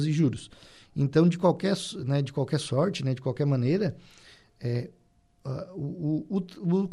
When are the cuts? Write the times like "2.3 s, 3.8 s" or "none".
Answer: none

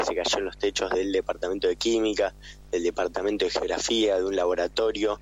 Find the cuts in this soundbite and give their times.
none

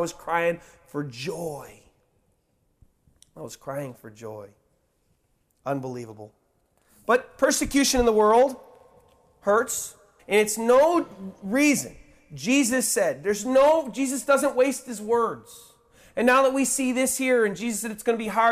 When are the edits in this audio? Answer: 10.2 s

